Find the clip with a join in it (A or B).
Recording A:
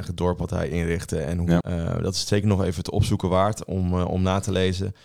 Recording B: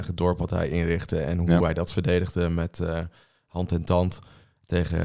A